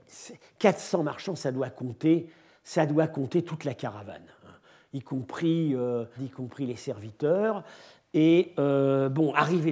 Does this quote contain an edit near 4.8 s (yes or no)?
no